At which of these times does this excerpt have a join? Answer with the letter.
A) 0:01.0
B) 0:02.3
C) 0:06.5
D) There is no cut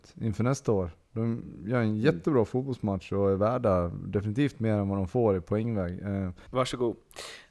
C